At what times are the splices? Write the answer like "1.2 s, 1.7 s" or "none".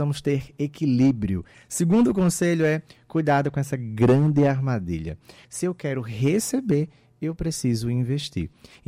1.5 s, 5.4 s